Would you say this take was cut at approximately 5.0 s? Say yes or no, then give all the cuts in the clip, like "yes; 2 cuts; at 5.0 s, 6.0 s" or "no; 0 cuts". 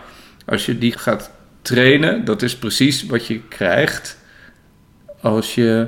no; 1 cut; at 0.9 s